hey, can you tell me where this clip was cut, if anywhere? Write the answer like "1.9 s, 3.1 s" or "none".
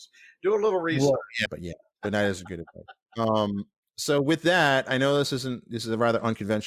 1.5 s